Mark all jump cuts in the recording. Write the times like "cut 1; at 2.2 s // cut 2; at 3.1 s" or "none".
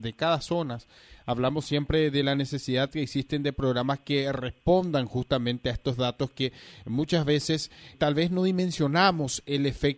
cut 1; at 7.9 s